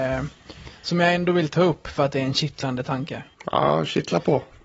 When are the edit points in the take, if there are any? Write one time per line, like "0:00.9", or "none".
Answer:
0:03.3